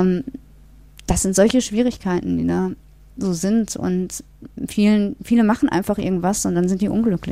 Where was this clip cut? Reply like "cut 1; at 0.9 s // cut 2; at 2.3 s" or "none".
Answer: none

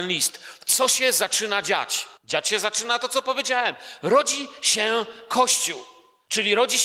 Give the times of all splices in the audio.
cut 1; at 2.2 s

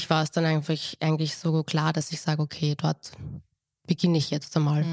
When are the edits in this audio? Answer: none

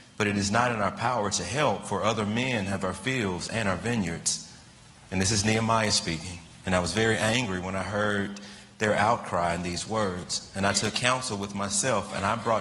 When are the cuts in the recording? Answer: none

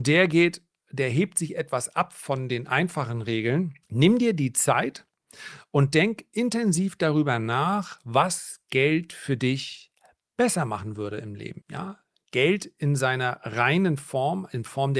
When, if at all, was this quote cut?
cut 1; at 3.8 s // cut 2; at 11.6 s

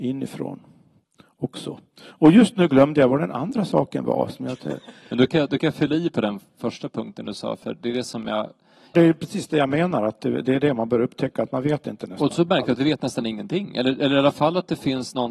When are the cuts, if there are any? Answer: cut 1; at 8.9 s

